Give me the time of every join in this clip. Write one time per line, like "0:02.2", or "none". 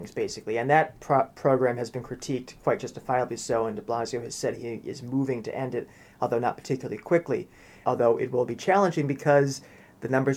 0:07.8